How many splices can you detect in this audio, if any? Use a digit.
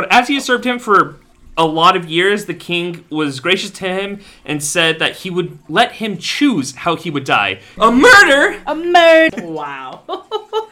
2